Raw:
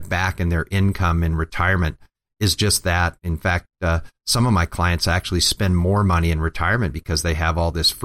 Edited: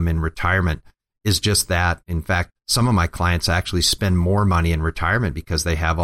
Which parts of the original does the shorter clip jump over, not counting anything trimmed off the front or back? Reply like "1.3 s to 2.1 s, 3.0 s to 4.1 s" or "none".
3.7 s to 4.1 s